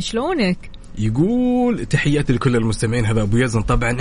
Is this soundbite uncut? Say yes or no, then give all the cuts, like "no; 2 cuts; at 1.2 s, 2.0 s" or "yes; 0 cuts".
yes; 0 cuts